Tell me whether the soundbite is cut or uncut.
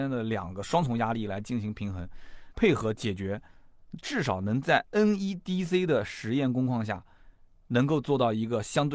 cut